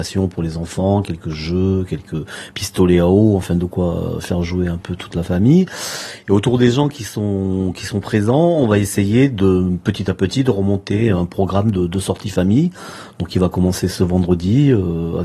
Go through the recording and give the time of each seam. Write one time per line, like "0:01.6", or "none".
none